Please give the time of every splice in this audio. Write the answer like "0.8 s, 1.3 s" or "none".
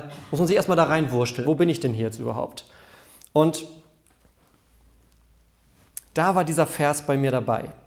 1.4 s

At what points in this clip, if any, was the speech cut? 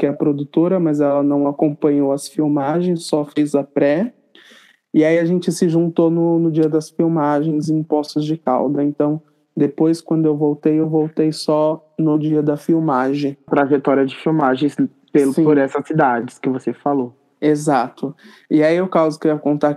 13.5 s

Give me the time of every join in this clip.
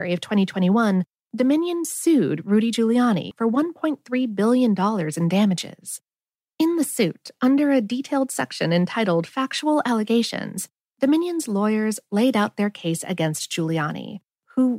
3.3 s

